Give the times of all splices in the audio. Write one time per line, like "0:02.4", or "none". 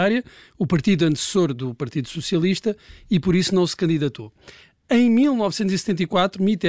none